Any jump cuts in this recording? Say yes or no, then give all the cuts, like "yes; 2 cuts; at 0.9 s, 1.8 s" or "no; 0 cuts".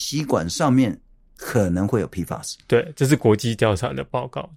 no; 0 cuts